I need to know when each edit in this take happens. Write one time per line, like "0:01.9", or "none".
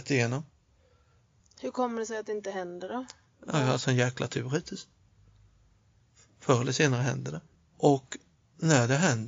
0:01.4
0:07.6